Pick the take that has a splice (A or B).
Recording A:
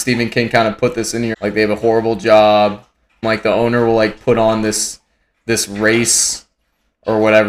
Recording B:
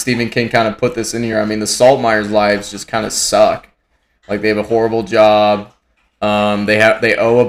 A